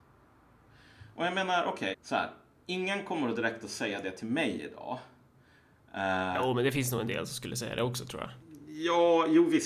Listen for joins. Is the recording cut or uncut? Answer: cut